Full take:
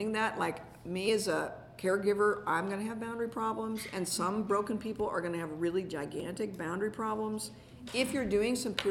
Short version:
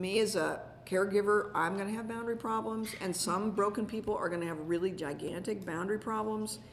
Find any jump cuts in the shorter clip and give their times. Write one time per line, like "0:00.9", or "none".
none